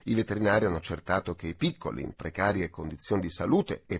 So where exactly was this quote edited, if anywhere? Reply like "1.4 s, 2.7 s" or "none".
none